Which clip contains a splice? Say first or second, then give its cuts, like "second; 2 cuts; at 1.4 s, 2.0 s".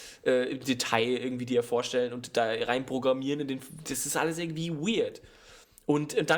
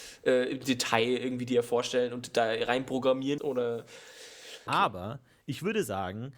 second; 2 cuts; at 3.4 s, 4.7 s